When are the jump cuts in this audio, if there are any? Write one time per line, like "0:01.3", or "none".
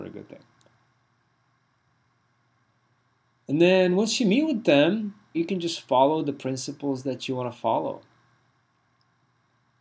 0:05.3